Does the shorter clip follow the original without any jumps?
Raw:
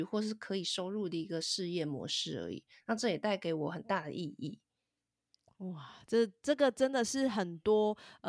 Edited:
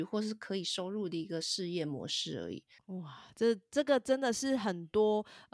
no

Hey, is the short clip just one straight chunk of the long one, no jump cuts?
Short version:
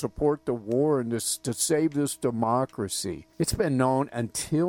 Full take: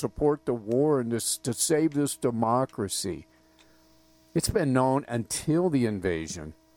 no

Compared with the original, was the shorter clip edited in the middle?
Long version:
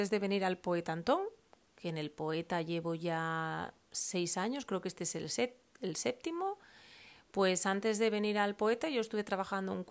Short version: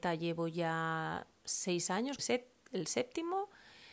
yes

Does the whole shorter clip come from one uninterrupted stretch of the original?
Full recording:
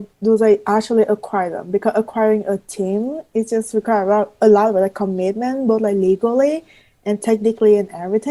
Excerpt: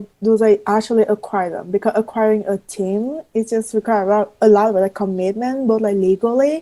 yes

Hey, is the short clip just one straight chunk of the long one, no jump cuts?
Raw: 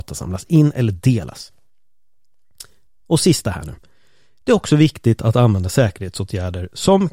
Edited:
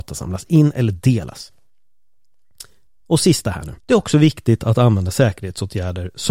no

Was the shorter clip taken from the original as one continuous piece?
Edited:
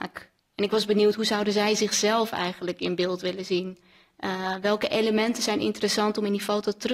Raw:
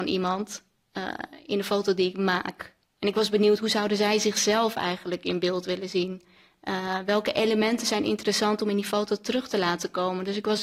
yes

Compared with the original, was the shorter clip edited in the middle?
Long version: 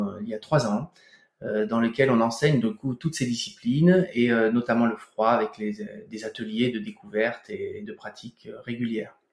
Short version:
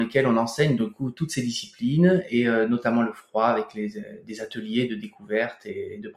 no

